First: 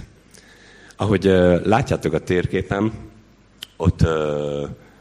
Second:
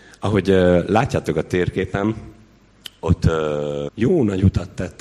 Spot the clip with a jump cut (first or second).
second